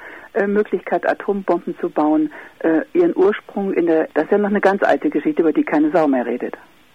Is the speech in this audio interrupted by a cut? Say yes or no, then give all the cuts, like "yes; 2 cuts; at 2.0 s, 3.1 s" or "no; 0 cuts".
yes; 1 cut; at 4.1 s